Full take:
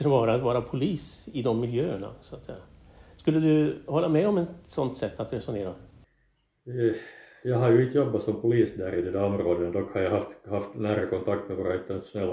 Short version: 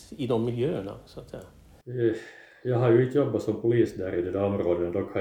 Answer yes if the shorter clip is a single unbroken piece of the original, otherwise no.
no